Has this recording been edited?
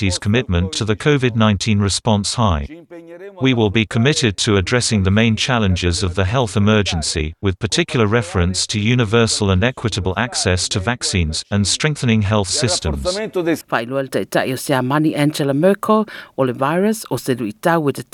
yes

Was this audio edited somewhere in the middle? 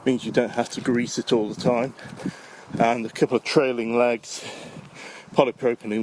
no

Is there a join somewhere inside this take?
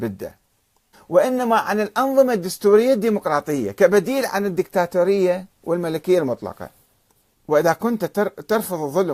yes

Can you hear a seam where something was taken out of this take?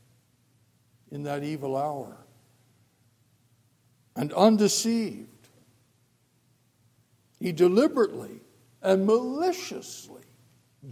no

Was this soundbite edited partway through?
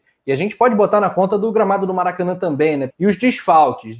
yes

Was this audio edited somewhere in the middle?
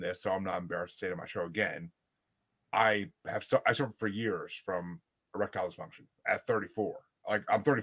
no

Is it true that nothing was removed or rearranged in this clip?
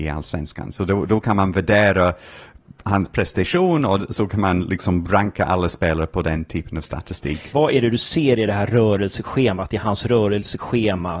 no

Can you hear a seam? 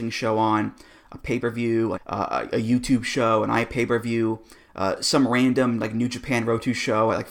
yes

